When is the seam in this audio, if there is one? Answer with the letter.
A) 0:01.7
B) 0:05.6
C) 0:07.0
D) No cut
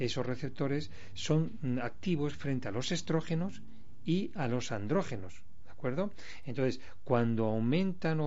D